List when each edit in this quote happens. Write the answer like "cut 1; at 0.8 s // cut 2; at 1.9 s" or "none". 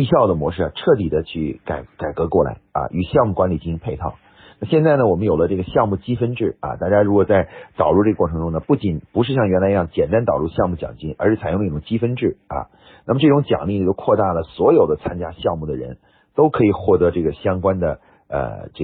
none

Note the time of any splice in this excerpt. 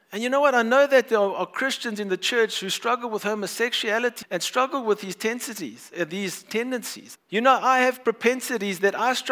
cut 1; at 4.2 s // cut 2; at 7.2 s

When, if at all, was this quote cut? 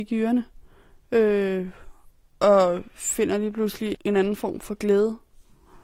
cut 1; at 3.9 s

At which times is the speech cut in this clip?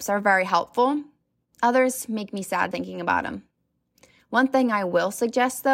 cut 1; at 2.7 s

